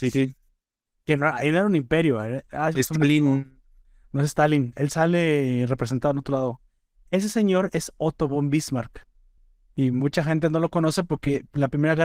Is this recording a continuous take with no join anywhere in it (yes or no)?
no